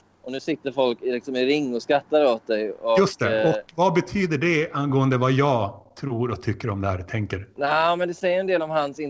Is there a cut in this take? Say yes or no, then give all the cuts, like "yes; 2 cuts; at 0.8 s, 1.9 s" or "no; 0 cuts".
no; 0 cuts